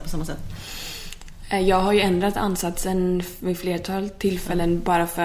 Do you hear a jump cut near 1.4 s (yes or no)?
no